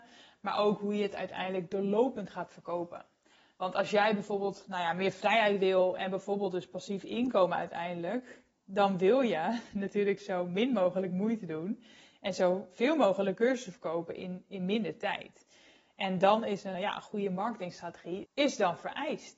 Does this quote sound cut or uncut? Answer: cut